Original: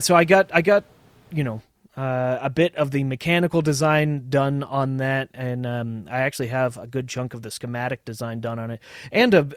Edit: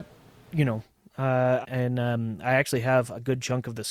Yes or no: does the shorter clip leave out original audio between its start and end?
yes